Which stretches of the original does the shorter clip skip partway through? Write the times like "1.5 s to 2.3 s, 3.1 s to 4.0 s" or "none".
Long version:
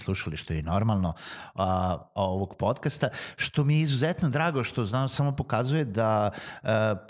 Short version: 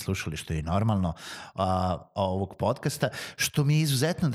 none